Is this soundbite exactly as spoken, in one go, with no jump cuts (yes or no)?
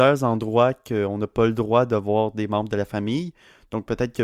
yes